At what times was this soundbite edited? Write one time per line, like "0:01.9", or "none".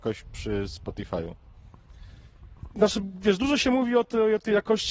0:02.7